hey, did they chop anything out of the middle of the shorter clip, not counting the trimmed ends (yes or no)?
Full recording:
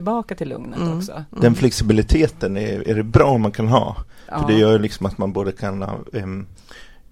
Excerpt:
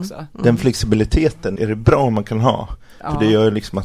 yes